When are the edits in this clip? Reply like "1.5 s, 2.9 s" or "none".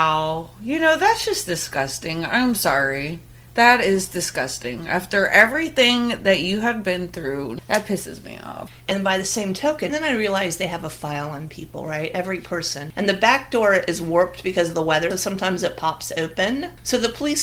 9.9 s, 12.9 s, 15.1 s